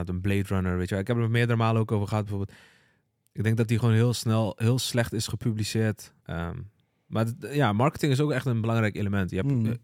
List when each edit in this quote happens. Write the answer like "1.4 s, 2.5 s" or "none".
6.2 s

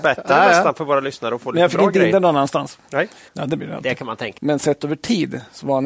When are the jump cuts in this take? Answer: 3.3 s, 4.4 s

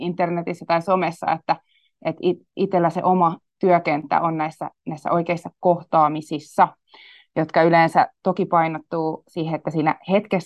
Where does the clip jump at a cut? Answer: none

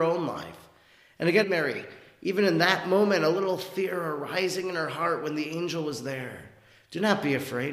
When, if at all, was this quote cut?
1.4 s

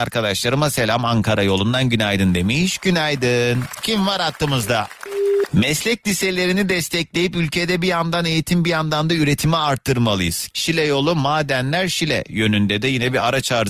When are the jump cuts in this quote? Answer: 5.5 s, 10.5 s

